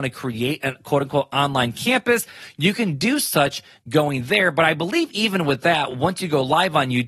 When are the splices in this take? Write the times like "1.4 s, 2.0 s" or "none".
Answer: none

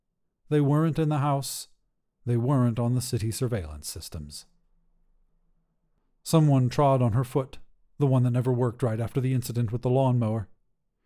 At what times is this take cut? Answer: none

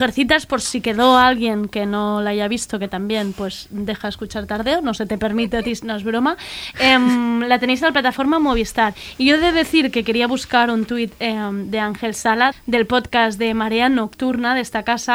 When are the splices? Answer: 12.5 s

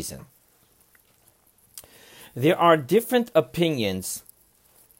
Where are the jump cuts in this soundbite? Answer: none

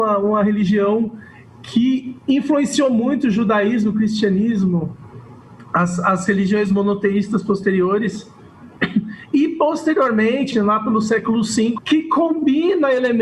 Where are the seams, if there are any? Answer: 10.5 s, 11.8 s

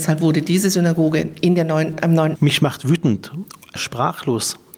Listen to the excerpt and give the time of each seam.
2.3 s

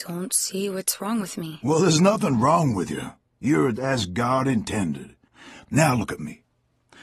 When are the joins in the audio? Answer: 3.7 s, 5.6 s

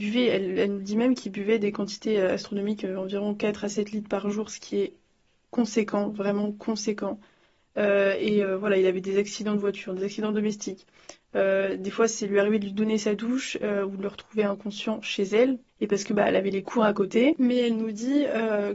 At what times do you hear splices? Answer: 15.7 s

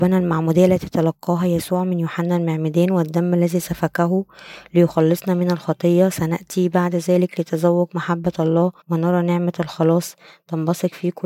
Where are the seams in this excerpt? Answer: 8.8 s

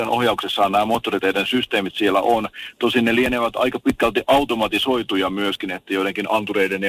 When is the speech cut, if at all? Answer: none

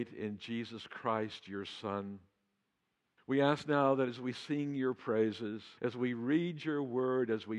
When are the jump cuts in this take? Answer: 3.2 s, 5.8 s

